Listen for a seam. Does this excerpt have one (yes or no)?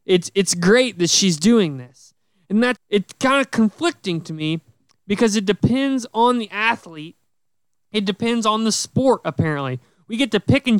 yes